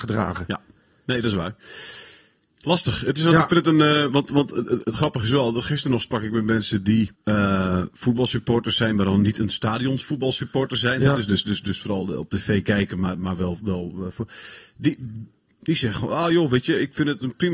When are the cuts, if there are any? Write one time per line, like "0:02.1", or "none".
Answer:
0:04.8
0:07.1